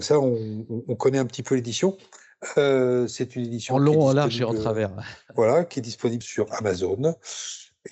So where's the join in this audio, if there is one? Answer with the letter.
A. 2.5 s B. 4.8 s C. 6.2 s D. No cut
C